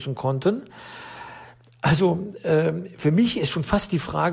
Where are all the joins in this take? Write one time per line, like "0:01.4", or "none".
none